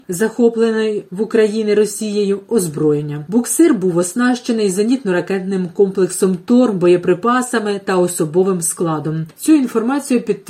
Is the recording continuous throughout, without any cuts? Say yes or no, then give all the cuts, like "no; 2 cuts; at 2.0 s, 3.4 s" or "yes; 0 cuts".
yes; 0 cuts